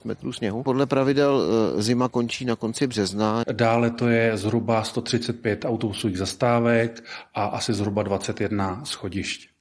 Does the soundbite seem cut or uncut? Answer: cut